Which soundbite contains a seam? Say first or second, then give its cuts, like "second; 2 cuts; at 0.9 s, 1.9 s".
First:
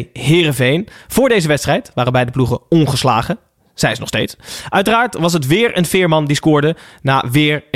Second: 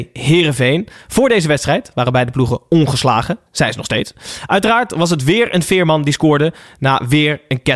second; 1 cut; at 3.5 s